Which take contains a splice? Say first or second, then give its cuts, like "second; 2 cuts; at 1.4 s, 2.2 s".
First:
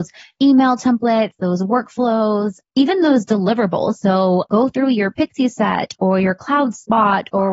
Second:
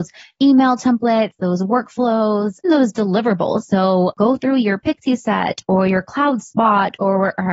second; 1 cut; at 2.6 s